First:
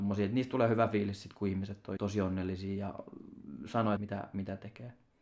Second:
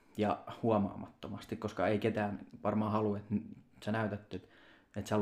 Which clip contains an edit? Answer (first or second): first